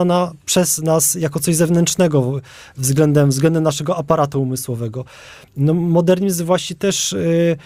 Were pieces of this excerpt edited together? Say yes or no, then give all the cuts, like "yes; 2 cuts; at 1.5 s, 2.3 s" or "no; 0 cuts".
no; 0 cuts